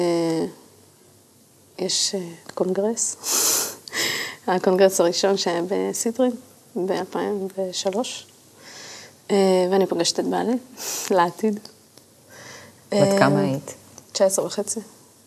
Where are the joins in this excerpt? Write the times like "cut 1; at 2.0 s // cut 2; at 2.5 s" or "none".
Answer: none